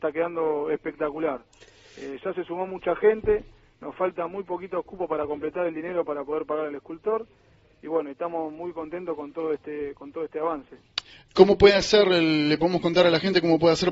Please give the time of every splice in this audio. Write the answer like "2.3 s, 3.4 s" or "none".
none